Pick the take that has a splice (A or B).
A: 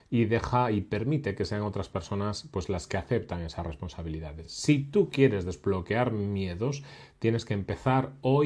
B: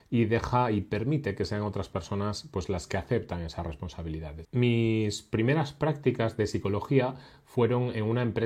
B